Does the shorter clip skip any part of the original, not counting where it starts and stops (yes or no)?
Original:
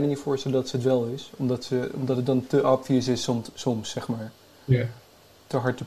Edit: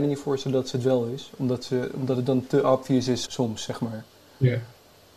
yes